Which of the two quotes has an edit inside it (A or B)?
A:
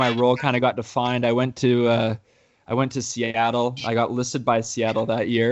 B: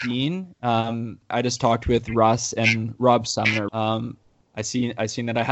B